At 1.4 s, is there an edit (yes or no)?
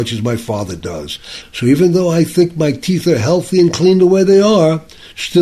yes